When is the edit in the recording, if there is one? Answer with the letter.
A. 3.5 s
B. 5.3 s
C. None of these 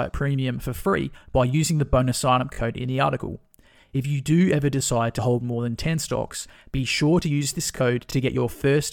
C